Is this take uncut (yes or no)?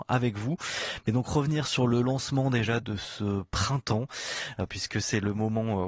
no